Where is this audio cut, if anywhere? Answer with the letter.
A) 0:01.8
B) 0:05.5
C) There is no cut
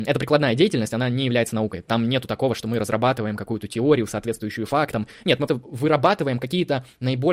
B